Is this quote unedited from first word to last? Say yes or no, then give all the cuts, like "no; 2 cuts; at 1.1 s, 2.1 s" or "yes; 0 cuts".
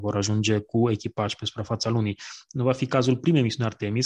yes; 0 cuts